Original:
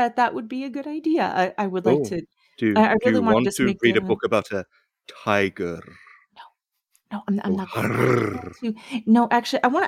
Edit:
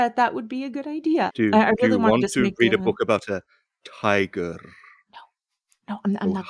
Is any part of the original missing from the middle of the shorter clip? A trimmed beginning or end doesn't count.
yes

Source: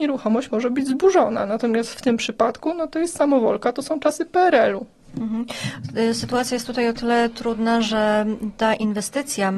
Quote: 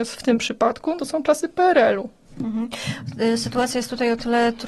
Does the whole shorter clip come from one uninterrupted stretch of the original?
no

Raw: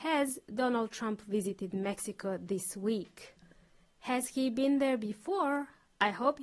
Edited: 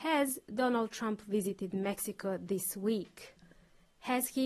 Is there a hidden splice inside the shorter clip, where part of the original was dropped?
no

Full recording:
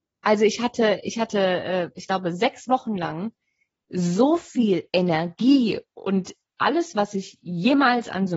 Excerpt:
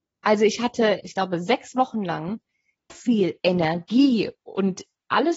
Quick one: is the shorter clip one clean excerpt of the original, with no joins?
no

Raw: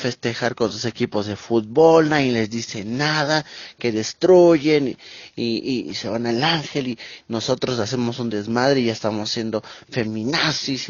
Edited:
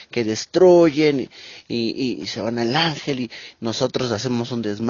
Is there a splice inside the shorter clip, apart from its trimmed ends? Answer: no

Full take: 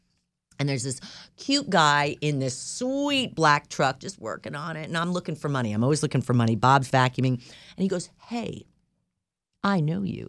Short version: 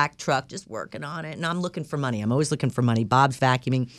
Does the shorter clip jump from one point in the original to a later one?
no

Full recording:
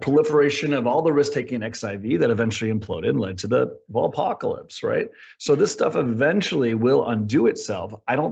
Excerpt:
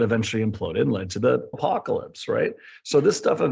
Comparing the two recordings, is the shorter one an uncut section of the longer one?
no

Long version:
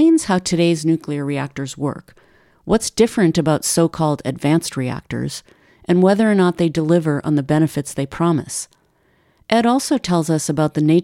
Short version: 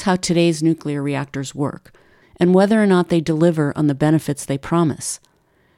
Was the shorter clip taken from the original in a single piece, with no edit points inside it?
no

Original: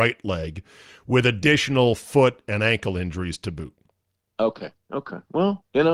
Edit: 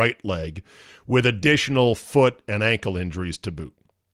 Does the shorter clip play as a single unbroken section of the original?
yes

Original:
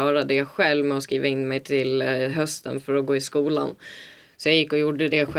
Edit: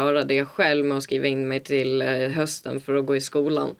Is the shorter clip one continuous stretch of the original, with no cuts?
yes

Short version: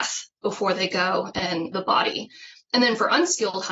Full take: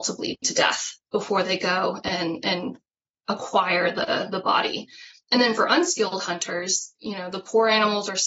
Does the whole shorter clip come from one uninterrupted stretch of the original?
no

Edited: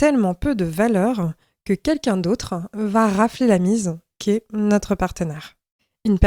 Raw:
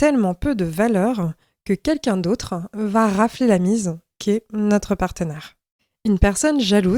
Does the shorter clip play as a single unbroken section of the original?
yes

